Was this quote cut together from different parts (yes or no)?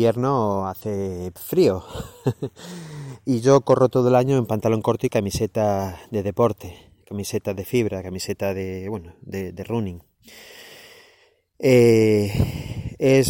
no